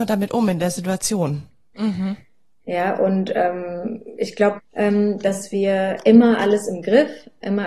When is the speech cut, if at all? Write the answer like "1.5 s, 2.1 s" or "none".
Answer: 1.7 s, 4.6 s